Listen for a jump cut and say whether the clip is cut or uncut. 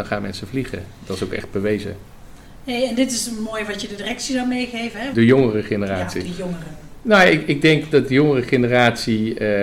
cut